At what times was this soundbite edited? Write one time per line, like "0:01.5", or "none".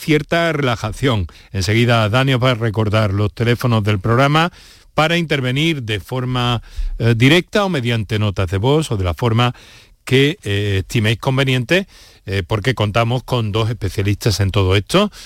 0:01.3